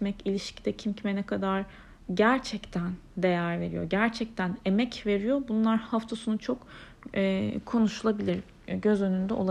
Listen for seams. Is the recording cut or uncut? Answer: uncut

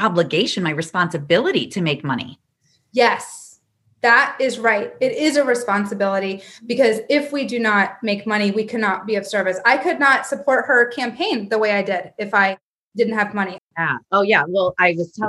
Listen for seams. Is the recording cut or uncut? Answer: cut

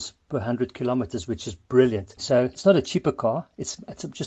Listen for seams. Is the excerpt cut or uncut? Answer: cut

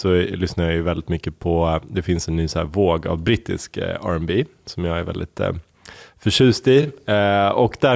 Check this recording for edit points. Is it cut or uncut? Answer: uncut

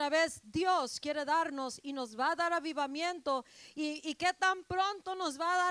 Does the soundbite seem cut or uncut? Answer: uncut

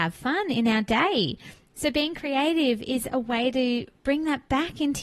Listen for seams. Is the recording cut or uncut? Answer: uncut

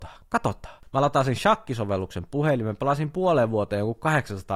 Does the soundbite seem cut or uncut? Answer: uncut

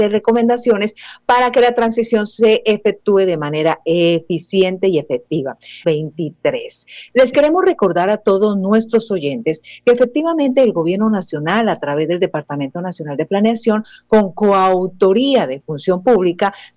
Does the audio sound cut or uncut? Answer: cut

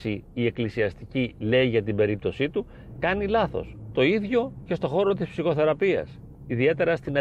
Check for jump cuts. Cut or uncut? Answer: cut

